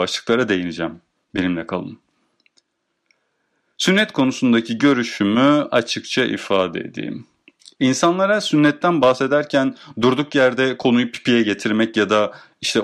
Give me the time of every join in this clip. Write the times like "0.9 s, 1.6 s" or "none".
none